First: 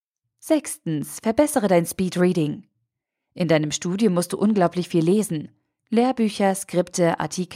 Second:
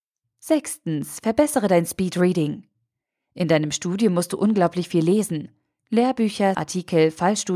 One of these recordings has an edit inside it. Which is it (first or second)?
second